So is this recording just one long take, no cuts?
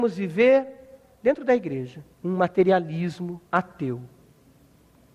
no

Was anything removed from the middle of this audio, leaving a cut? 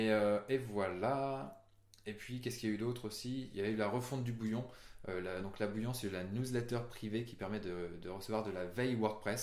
no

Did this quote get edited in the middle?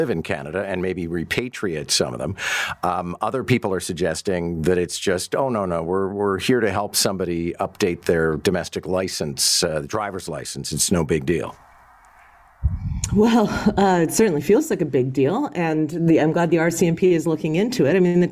no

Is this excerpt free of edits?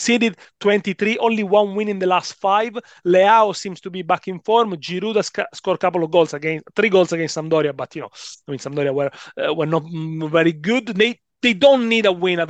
yes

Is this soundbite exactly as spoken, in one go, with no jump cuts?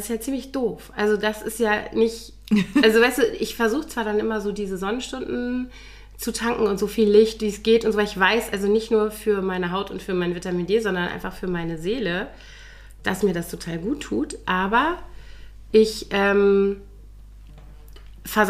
yes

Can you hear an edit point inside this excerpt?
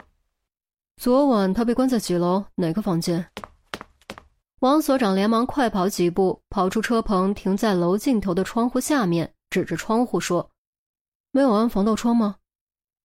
yes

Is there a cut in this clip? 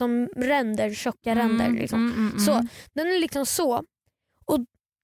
no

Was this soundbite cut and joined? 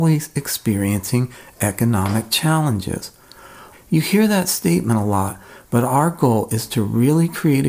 yes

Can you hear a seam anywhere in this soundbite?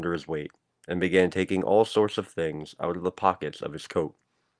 no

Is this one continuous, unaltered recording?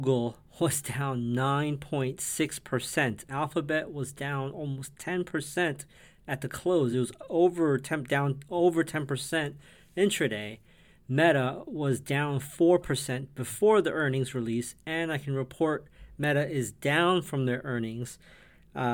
yes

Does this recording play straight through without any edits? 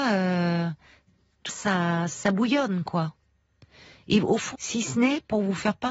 no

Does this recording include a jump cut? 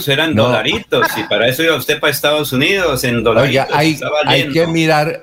no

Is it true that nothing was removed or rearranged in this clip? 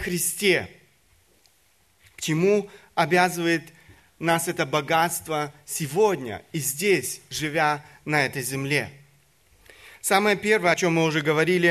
yes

